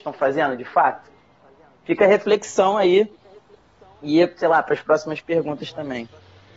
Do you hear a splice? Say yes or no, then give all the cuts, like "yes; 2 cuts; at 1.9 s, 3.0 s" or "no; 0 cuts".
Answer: no; 0 cuts